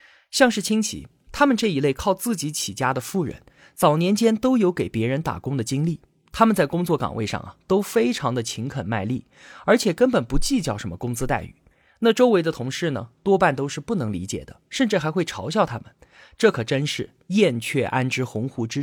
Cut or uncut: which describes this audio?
uncut